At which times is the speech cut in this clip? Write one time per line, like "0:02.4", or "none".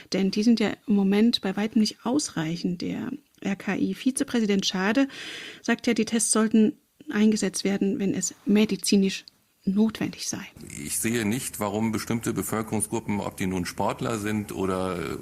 none

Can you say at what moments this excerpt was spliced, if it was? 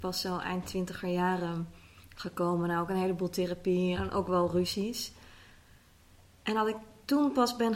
0:03.9

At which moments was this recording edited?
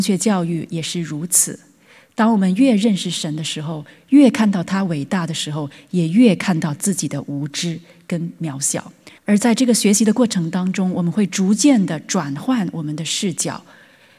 0:09.2

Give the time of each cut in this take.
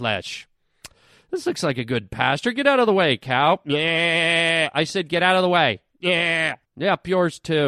0:06.6

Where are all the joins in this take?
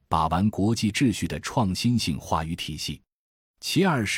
none

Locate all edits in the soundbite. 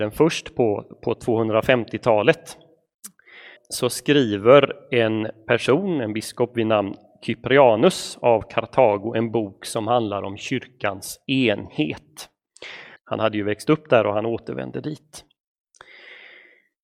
0:03.6
0:13.0

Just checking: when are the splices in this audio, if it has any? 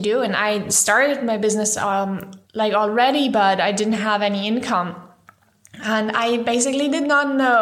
0:02.4

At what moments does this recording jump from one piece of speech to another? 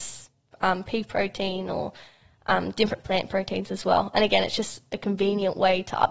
none

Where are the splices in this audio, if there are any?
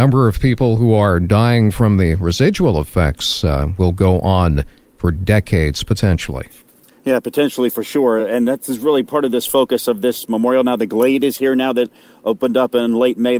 none

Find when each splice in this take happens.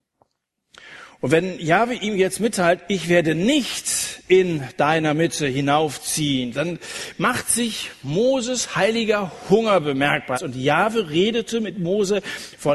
0:06.5
0:10.3

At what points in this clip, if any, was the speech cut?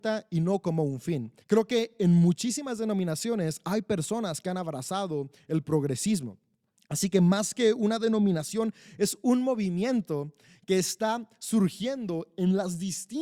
0:01.4

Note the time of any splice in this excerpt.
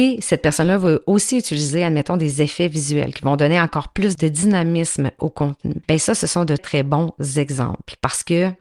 0:06.6

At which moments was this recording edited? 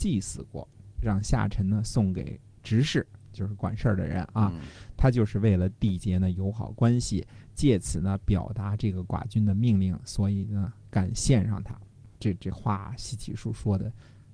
none

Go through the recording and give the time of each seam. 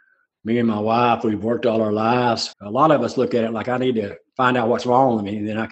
0:02.5

